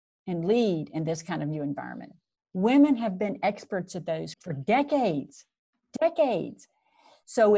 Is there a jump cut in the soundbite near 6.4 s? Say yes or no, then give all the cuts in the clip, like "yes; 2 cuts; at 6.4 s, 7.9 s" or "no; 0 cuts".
no; 2 cuts; at 2.4 s, 4.3 s